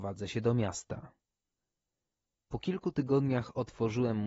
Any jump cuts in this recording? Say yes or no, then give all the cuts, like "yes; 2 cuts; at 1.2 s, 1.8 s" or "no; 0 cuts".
no; 0 cuts